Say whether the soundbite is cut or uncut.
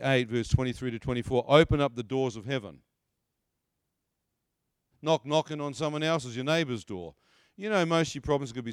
cut